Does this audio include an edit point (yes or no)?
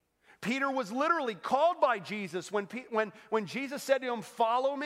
no